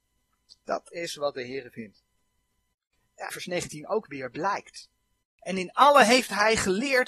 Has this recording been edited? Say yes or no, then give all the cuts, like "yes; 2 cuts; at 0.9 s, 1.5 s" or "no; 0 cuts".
yes; 2 cuts; at 3.3 s, 5.2 s